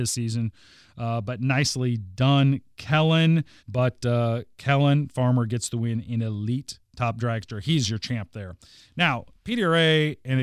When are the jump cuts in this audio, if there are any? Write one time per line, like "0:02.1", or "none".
0:03.6